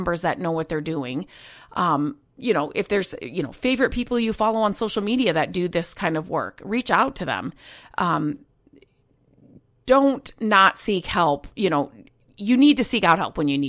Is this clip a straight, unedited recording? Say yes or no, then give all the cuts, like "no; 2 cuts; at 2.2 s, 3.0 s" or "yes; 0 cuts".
yes; 0 cuts